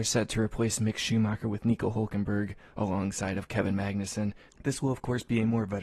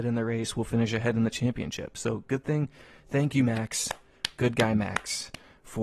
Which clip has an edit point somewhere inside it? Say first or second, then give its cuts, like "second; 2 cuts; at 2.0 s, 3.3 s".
first; 1 cut; at 4.5 s